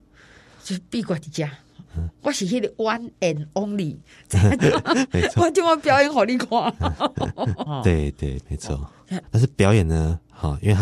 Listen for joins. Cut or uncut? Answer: cut